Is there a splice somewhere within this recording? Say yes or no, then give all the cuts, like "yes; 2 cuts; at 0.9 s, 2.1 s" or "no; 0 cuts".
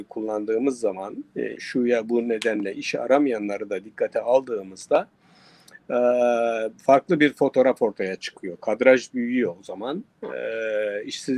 yes; 1 cut; at 1.6 s